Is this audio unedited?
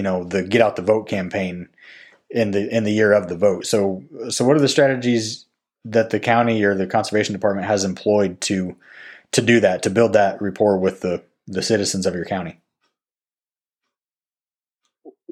yes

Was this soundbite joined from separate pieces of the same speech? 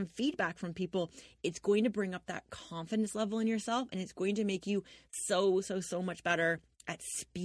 no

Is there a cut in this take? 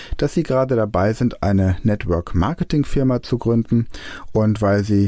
no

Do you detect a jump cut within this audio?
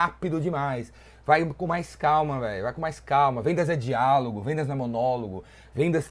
no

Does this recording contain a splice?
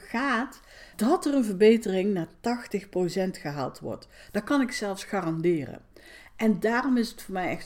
yes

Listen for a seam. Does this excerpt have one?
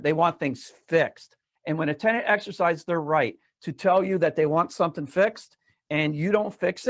yes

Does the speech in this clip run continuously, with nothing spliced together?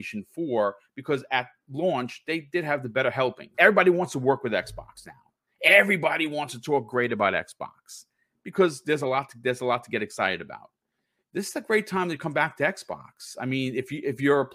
no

